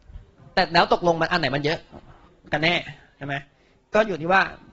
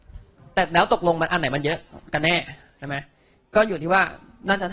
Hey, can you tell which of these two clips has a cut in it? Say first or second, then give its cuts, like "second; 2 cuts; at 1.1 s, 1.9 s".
second; 1 cut; at 2.1 s